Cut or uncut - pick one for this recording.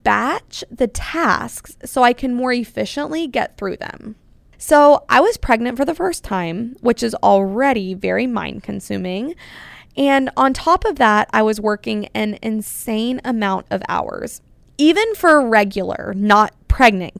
cut